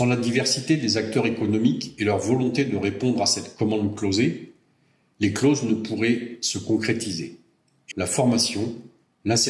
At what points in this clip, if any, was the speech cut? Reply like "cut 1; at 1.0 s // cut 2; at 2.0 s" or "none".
cut 1; at 7.9 s